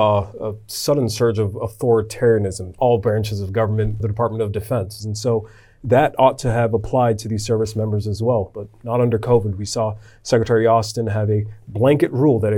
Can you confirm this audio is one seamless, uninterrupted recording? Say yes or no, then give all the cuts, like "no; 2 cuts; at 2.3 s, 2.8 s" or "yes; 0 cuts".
no; 3 cuts; at 2.8 s, 4.0 s, 5.0 s